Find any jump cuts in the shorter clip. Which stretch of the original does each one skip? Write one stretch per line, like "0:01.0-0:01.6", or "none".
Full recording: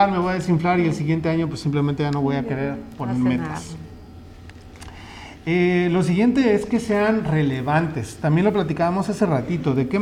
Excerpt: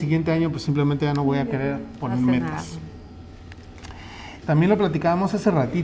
0:05.4-0:08.2

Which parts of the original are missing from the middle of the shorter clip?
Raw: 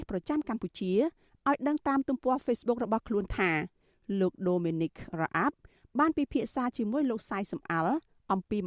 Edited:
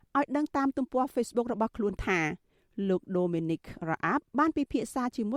0:05.6-0:05.9

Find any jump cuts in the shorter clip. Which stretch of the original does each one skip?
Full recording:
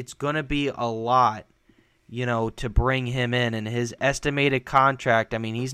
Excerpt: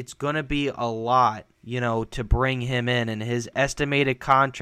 0:01.5-0:02.0

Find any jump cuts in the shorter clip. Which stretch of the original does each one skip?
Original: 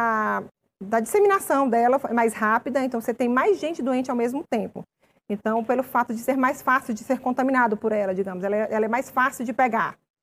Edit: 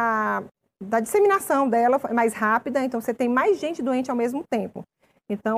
none

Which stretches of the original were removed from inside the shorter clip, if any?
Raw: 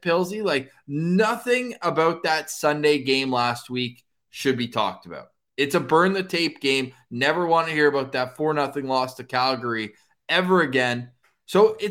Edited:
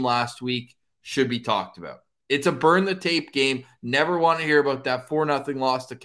none

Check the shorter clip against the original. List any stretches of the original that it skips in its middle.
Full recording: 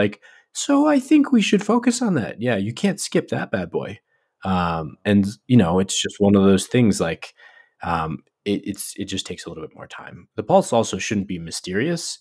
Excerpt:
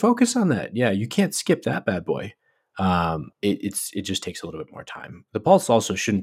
0:05.0-0:08.4

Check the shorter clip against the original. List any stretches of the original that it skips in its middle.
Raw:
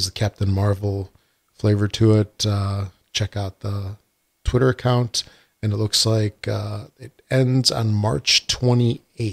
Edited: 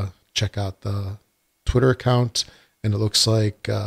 none

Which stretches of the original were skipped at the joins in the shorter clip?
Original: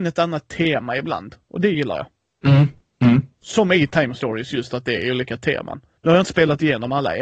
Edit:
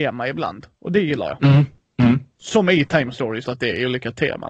0:02.1-0:02.4
0:04.5-0:04.7

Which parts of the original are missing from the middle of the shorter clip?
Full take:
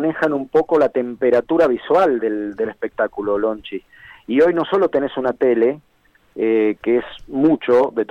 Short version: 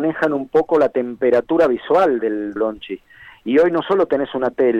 0:02.6-0:03.4

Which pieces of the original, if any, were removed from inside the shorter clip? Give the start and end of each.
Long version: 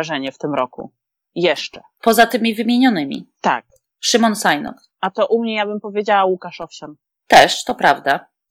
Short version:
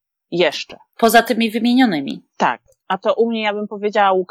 0:03.9-0:05.0

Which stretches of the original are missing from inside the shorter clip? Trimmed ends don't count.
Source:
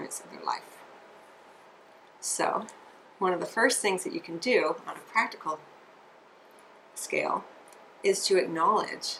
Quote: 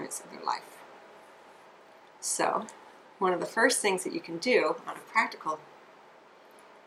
none

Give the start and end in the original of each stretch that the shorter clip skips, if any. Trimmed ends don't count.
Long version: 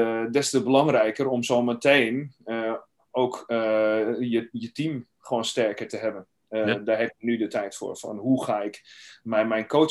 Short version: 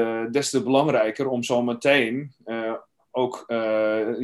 none

